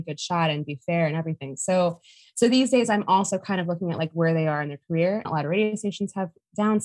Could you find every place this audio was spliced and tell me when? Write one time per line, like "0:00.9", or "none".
0:05.3